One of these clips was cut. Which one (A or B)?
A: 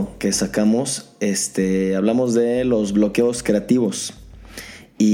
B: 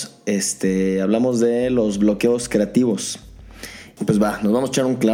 B